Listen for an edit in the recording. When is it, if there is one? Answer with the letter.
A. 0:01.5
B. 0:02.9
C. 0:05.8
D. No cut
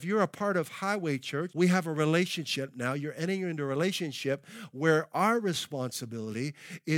A